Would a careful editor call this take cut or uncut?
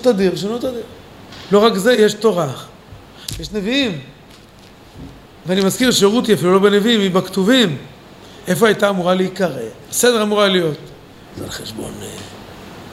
cut